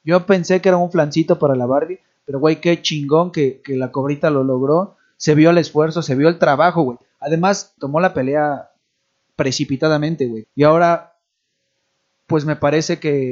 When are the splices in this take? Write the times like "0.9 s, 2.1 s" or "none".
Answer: 7.8 s, 10.4 s